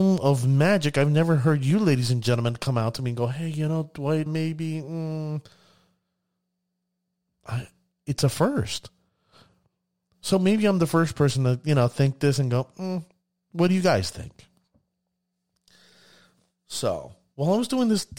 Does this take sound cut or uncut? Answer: cut